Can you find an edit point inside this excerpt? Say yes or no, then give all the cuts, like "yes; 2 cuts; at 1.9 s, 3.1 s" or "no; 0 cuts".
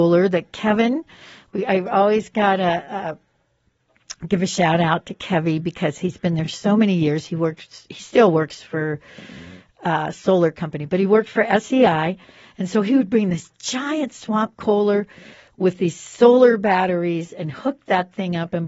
no; 0 cuts